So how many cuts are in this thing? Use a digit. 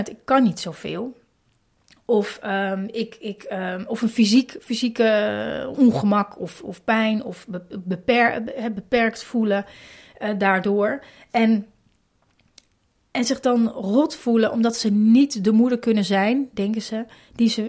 0